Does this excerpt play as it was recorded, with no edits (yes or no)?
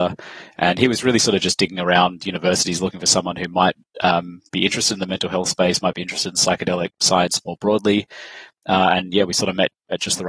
yes